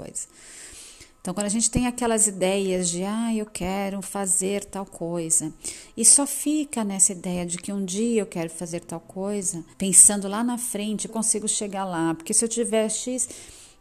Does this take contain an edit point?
yes; 2 cuts; at 9.7 s, 11.1 s

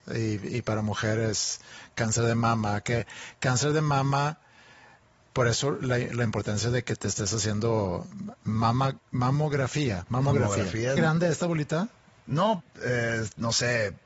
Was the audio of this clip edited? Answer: yes; 2 cuts; at 11.0 s, 12.6 s

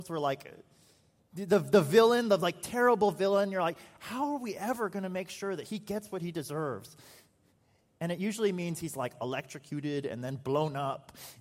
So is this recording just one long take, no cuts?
yes; 0 cuts

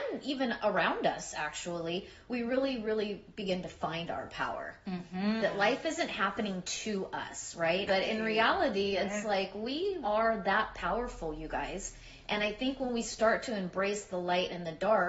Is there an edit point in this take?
yes; 3 cuts; at 5.4 s, 7.9 s, 10.0 s

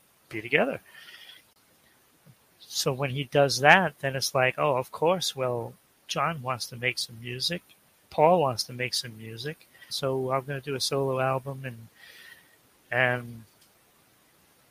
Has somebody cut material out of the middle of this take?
yes; 1 cut; at 9.9 s

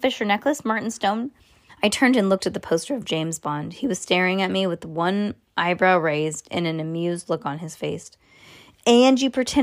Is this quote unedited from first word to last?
no; 1 cut; at 1.7 s

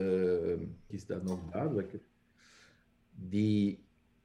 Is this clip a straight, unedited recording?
no; 1 cut; at 0.9 s

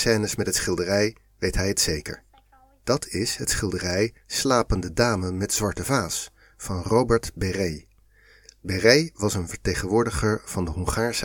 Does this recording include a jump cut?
no; 0 cuts

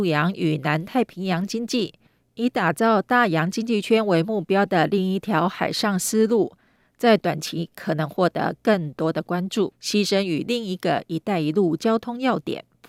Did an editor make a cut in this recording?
yes; 1 cut; at 9.7 s

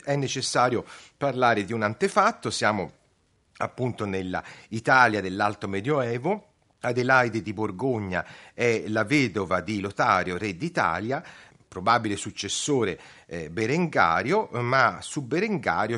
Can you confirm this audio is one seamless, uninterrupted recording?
yes; 0 cuts

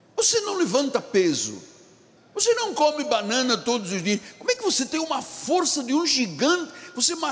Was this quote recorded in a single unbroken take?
no; 1 cut; at 2.2 s

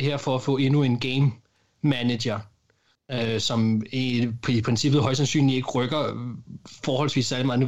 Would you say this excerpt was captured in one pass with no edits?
yes; 0 cuts

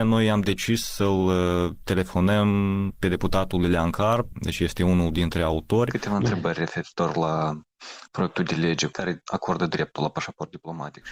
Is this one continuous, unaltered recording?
yes; 0 cuts

